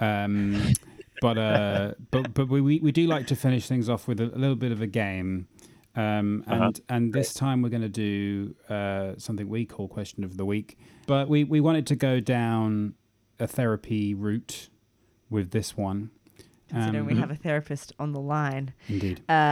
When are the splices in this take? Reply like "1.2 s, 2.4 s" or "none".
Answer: none